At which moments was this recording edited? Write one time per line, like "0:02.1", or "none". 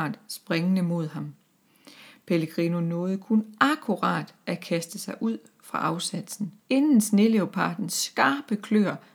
0:06.6